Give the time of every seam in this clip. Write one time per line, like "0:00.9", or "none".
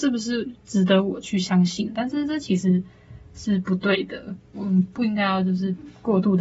0:01.9
0:04.5

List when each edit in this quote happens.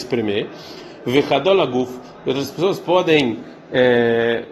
none

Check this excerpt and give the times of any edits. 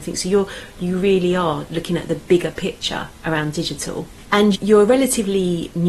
0:04.2

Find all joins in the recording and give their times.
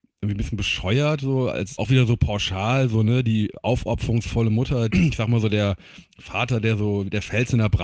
0:01.8
0:04.9

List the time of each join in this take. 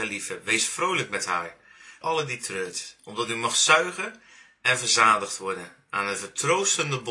0:02.0

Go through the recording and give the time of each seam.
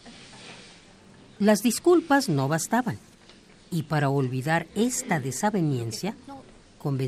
none

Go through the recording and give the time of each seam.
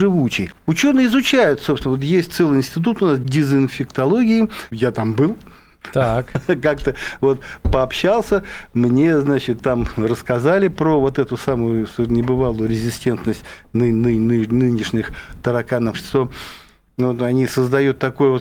0:15.9

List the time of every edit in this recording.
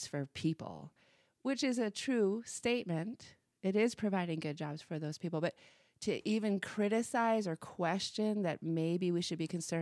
none

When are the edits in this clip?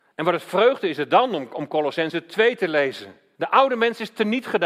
0:03.4

